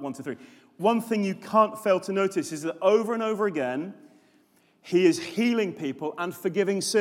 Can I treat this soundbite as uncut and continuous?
yes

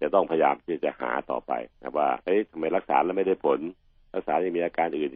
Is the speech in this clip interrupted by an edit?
yes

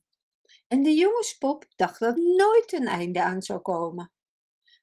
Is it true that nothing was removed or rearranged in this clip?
no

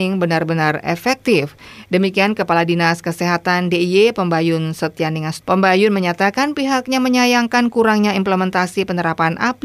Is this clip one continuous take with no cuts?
no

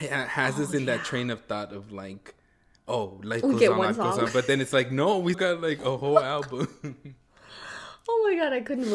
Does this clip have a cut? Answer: yes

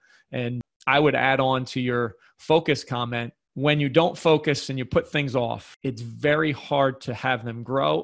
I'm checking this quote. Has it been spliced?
no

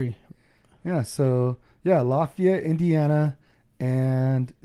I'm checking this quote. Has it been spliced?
no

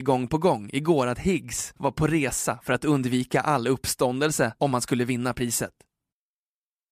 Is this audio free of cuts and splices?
no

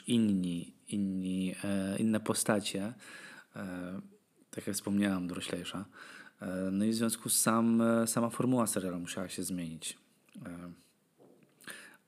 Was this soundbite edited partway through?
no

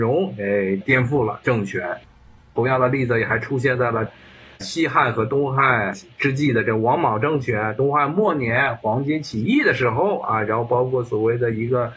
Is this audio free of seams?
yes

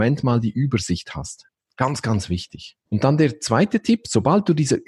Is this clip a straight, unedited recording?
no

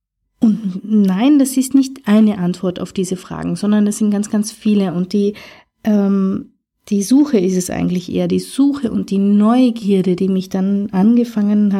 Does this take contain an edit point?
no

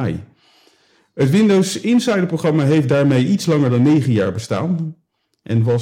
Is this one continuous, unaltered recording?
yes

